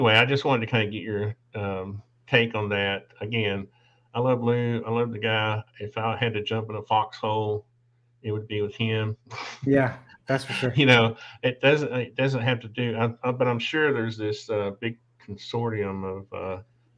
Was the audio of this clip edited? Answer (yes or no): no